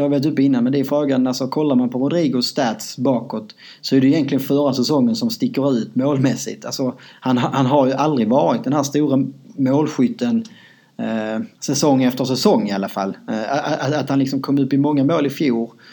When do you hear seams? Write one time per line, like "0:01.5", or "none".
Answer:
0:11.5

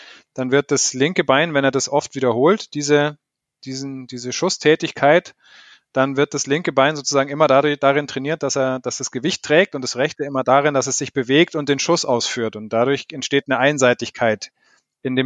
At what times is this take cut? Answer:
none

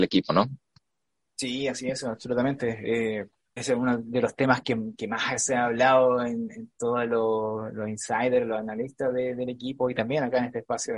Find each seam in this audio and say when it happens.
0:03.6

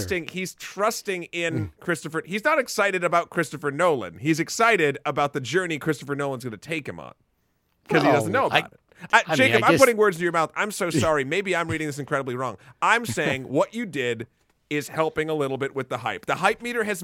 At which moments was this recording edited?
none

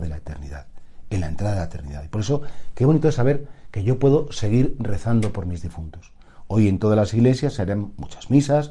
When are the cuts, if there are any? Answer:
none

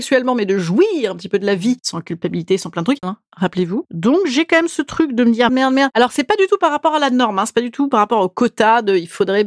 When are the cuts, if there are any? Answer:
0:03.0
0:05.5

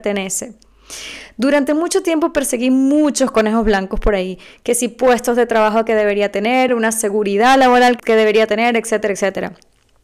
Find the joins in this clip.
0:06.7
0:08.0

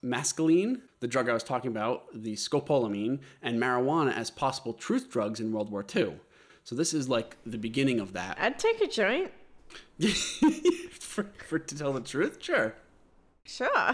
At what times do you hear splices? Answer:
none

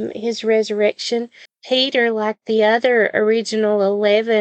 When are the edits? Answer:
0:01.5

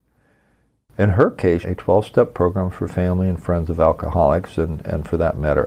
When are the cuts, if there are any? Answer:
0:01.6

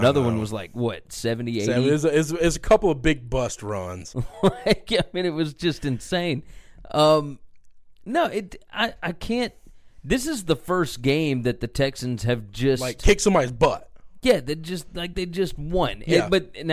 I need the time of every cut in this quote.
0:04.1

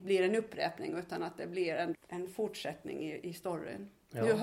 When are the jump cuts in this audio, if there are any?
0:01.9

